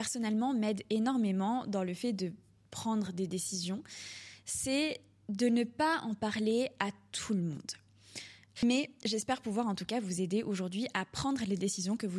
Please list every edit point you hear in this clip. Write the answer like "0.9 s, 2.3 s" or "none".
8.6 s